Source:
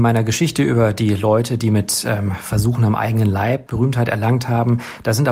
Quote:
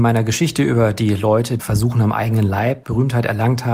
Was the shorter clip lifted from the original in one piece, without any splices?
no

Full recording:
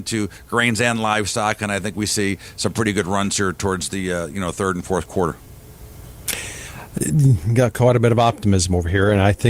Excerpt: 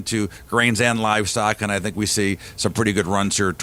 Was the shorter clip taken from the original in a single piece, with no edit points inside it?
yes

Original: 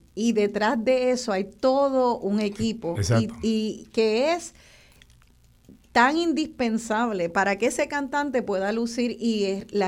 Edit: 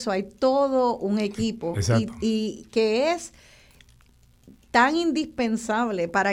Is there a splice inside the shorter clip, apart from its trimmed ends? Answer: no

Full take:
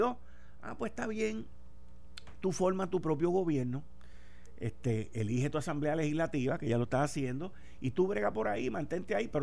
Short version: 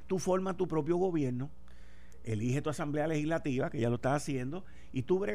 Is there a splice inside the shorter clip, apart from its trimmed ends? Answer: yes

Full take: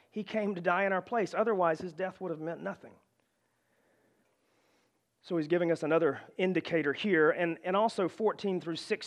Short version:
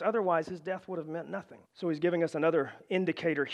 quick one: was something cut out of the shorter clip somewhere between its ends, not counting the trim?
yes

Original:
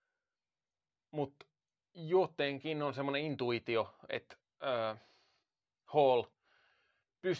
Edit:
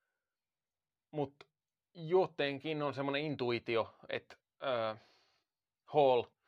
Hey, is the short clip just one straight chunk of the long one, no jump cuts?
yes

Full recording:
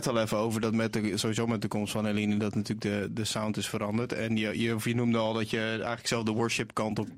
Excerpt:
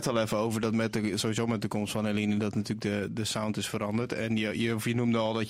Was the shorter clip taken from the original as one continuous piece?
yes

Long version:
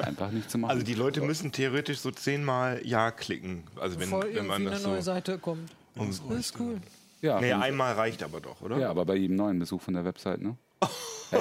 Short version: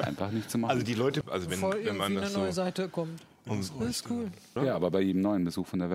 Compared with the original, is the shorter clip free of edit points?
no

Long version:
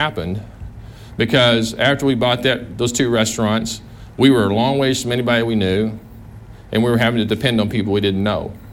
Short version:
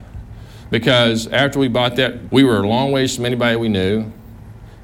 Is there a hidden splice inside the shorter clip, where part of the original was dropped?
yes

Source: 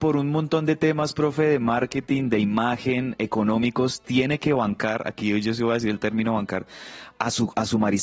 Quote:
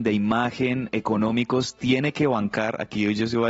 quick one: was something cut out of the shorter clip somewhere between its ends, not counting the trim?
no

